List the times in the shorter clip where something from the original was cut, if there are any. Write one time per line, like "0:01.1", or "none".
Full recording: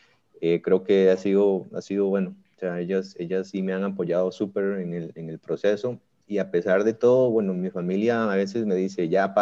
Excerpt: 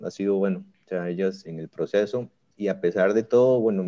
0:01.4

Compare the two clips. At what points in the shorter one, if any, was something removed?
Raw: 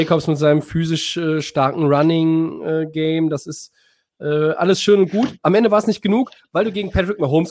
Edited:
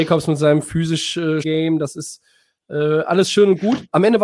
0:01.4

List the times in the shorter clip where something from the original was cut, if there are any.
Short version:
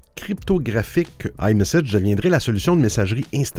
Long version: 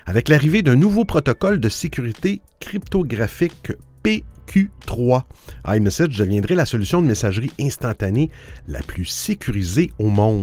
0:01.4

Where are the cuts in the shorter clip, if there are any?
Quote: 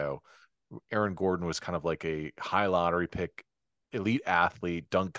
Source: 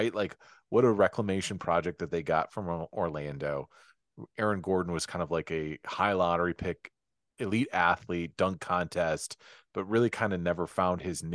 none

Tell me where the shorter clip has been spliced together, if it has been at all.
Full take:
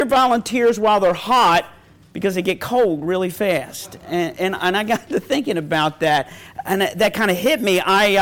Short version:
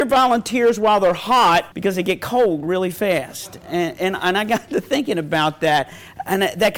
0:01.7

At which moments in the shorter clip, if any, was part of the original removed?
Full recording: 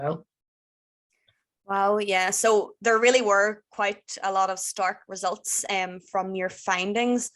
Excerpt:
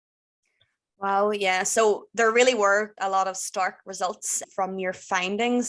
0:03.0
0:04.4

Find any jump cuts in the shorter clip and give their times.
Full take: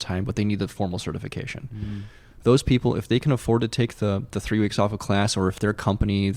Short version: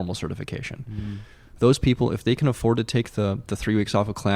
none

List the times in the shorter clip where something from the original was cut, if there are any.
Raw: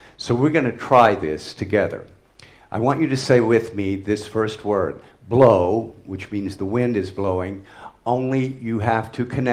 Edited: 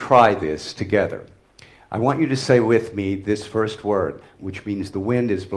0:04.3

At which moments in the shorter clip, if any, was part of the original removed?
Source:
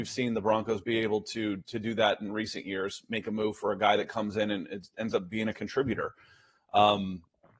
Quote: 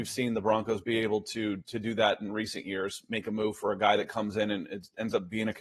none

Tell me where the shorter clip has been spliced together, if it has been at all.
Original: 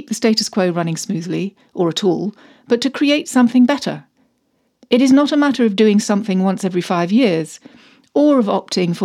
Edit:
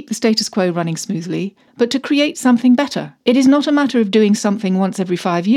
0:01.7
0:03.2

